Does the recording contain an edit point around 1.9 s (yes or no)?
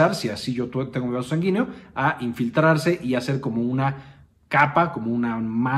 no